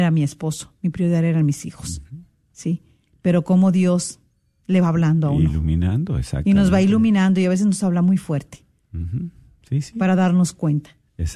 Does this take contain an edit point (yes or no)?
no